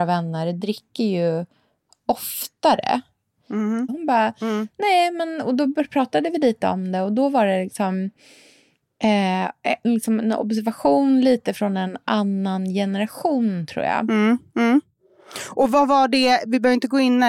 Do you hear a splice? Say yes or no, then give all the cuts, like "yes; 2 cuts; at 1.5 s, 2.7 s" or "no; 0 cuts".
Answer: yes; 1 cut; at 3.9 s